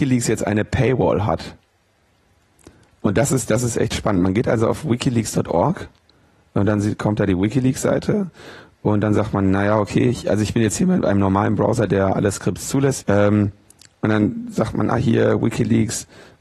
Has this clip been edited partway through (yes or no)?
yes